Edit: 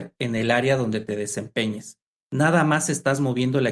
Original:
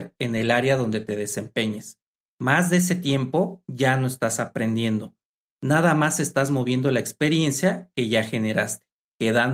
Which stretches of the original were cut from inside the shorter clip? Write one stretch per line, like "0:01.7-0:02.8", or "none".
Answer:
0:02.1-0:05.4